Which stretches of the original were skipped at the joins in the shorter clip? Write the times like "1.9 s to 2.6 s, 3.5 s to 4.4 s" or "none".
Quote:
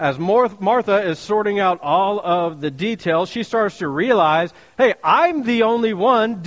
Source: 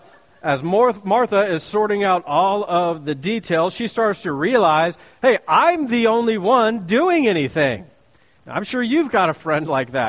none